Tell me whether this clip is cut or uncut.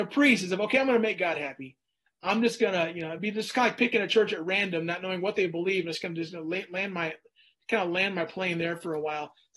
uncut